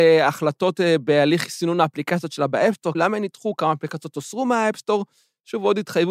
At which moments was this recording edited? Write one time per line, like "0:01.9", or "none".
0:02.9

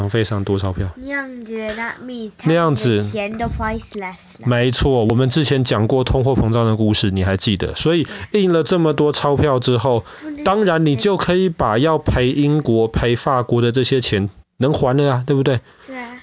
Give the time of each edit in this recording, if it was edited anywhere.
none

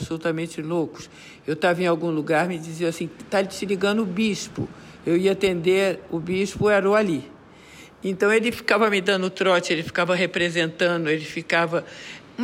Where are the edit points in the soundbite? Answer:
none

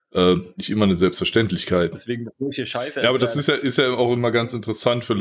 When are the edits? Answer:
0:01.9

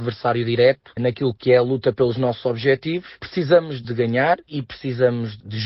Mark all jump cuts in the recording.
none

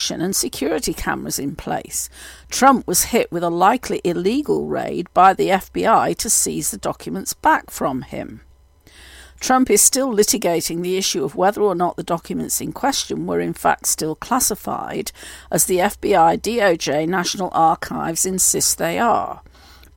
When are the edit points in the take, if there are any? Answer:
none

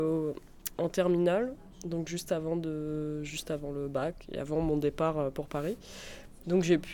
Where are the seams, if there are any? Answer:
none

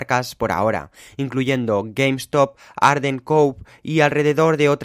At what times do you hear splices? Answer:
none

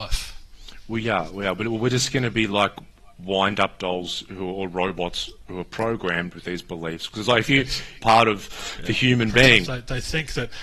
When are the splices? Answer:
0:08.0
0:09.6

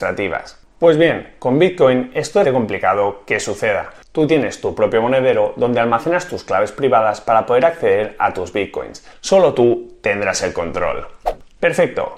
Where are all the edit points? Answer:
0:02.4
0:09.1

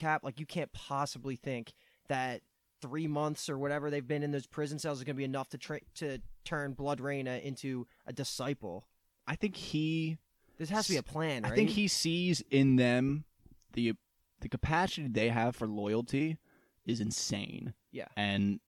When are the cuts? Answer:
none

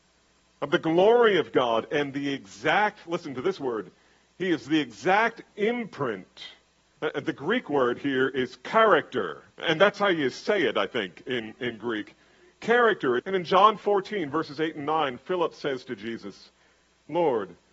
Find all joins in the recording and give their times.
0:09.5
0:13.2

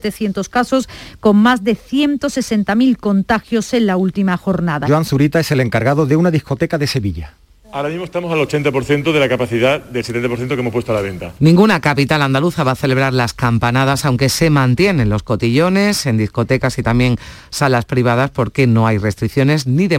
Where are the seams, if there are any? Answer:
0:04.8
0:11.4

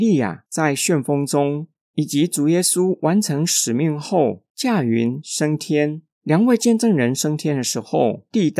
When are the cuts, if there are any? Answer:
0:06.1

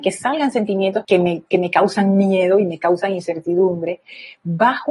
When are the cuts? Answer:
0:01.0

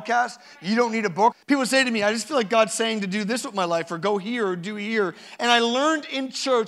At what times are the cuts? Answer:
0:01.3

